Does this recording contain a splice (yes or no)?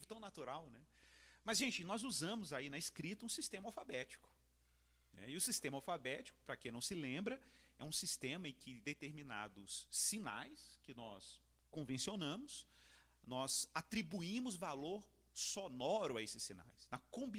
no